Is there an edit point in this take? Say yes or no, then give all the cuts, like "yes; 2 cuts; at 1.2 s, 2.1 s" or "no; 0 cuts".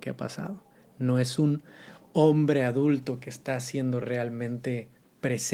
no; 0 cuts